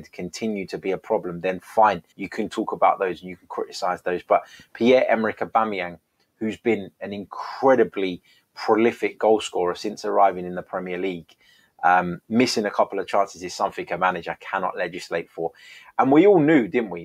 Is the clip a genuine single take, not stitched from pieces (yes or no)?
no